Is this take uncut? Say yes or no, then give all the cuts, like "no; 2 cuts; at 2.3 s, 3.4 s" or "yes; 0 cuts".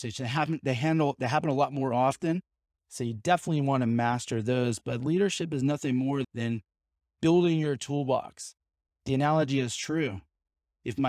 yes; 0 cuts